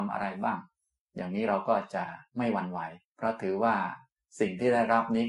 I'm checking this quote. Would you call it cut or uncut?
cut